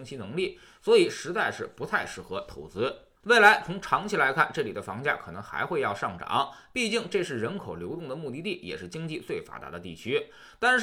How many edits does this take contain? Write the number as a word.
one